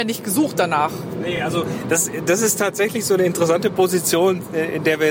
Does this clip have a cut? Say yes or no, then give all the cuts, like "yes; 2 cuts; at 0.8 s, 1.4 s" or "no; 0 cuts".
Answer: no; 0 cuts